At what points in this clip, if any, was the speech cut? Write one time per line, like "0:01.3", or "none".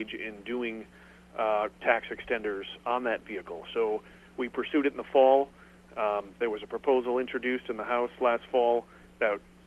none